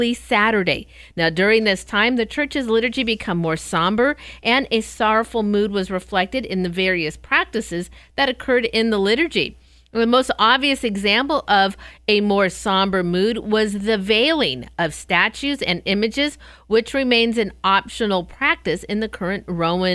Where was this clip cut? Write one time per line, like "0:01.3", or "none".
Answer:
none